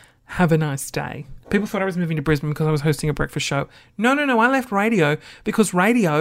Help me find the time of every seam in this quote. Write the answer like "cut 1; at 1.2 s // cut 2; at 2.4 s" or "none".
cut 1; at 1.4 s